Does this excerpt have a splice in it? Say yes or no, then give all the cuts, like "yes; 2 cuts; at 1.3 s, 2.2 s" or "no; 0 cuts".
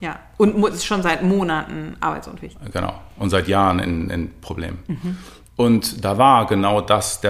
no; 0 cuts